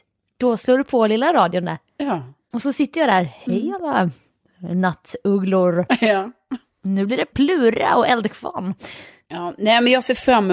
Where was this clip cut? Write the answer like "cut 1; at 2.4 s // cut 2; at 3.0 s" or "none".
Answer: none